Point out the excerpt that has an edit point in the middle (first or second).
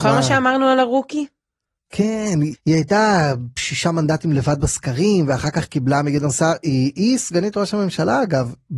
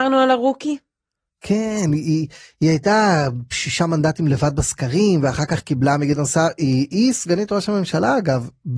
first